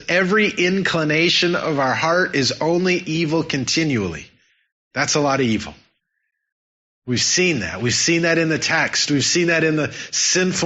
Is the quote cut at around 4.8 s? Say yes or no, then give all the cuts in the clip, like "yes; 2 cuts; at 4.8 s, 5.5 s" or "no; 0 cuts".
no; 0 cuts